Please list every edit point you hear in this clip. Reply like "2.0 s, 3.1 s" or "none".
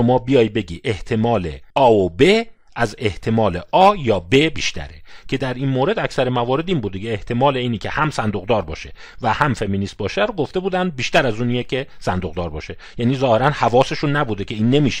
1.7 s